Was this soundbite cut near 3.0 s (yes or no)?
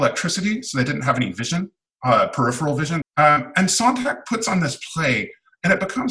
yes